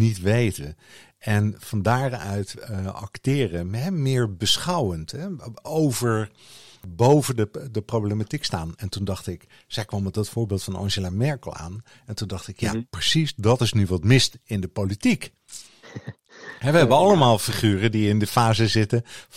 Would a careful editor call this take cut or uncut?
uncut